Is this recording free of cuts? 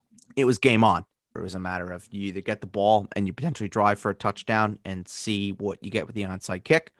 no; 1 cut; at 1.4 s

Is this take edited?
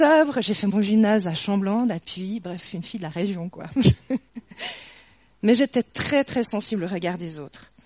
no; 0 cuts

